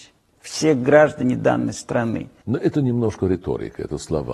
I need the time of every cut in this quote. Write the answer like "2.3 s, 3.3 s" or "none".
2.4 s